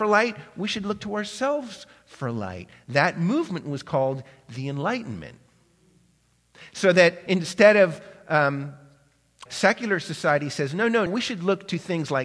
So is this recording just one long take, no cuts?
no; 2 cuts; at 9.5 s, 11.1 s

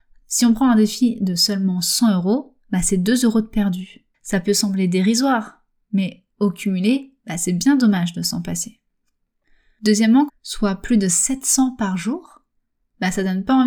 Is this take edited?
yes; 2 cuts; at 4.1 s, 10.3 s

